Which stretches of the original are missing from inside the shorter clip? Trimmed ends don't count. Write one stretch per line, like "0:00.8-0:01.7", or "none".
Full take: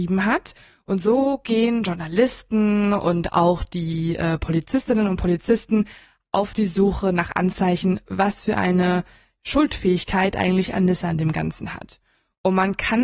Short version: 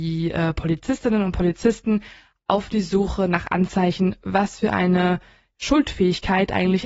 none